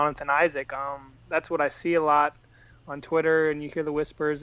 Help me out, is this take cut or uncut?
uncut